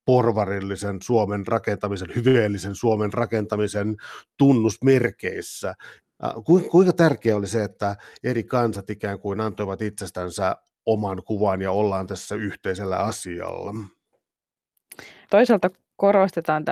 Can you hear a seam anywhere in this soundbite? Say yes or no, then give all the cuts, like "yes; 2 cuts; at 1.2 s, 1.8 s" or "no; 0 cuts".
yes; 1 cut; at 15.2 s